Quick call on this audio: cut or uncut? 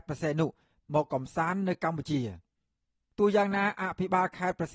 uncut